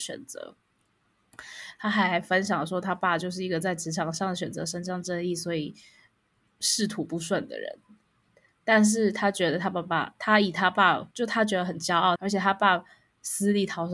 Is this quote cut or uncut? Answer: cut